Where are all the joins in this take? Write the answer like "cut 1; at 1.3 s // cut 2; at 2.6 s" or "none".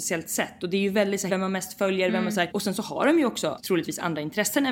cut 1; at 1.3 s